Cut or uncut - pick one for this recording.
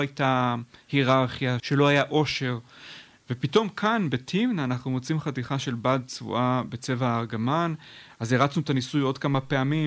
cut